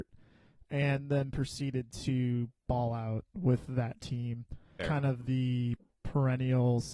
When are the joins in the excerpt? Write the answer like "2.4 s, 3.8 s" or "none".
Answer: 4.8 s